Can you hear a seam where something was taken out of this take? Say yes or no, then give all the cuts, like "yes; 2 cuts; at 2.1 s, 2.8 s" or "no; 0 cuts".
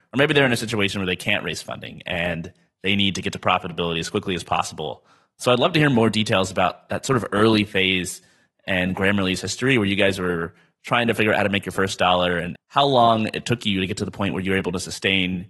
yes; 1 cut; at 12.6 s